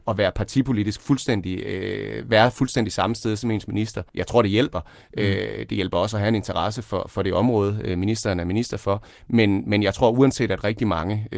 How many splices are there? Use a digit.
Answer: 1